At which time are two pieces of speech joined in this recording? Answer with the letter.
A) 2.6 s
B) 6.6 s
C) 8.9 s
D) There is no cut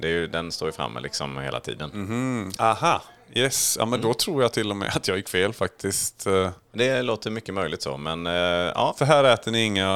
A